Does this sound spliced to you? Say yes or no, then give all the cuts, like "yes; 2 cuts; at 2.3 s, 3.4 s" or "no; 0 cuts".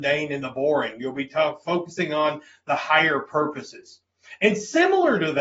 no; 0 cuts